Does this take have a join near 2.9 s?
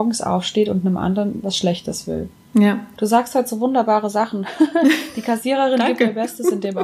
yes; 1 cut; at 2.9 s

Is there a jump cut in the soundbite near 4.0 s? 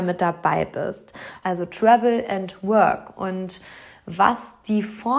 no; 1 cut; at 1.4 s

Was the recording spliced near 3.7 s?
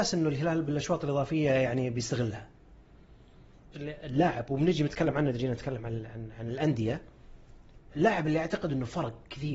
yes; 1 cut; at 3.7 s

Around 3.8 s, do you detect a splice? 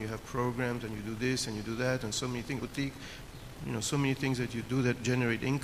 no; 1 cut; at 2.6 s

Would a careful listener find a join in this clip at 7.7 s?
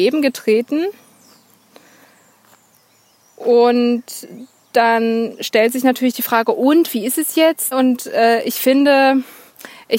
yes; 1 cut; at 7.7 s

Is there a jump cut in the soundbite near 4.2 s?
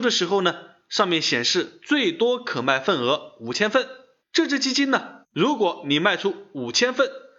yes; 2 cuts; at 4.2 s, 5.2 s

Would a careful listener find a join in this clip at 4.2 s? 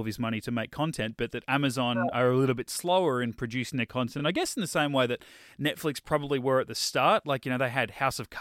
no; 0 cuts

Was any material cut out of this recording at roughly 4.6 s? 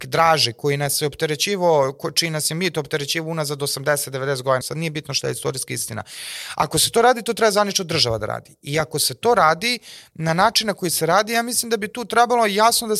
yes; 1 cut; at 4.6 s

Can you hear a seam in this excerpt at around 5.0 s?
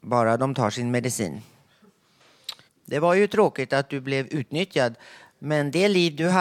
no; 1 cut; at 2.7 s

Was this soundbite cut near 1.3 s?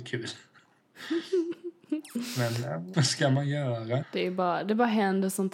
no; 2 cuts; at 2.9 s, 4.0 s

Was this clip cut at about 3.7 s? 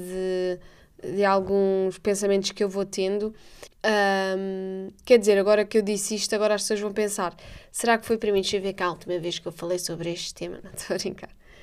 yes; 1 cut; at 3.7 s

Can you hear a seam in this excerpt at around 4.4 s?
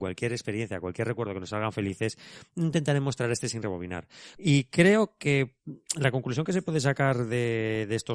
yes; 1 cut; at 4.4 s

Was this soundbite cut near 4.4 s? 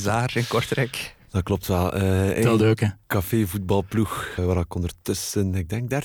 yes; 1 cut; at 4.4 s

